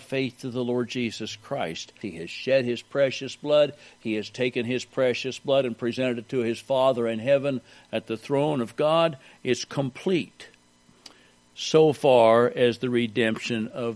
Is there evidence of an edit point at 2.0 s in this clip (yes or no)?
yes